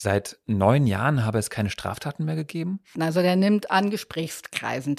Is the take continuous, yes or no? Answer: no